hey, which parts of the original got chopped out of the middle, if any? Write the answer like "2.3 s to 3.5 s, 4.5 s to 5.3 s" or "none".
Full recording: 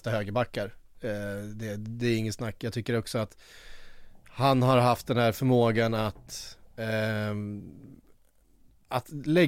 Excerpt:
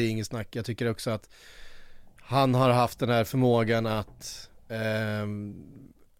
none